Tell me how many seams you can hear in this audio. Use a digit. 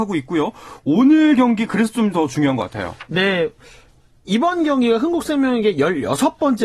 0